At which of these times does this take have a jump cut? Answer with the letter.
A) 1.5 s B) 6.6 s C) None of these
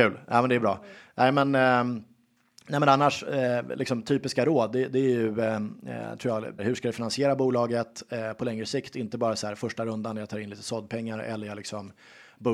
B